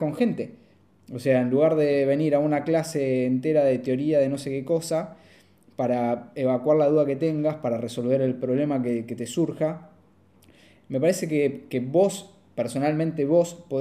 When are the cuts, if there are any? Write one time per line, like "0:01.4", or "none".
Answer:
none